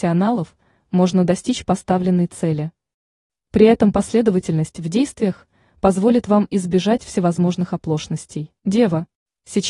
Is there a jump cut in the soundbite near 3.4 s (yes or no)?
no